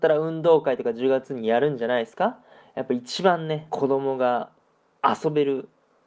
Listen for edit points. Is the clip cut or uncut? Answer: cut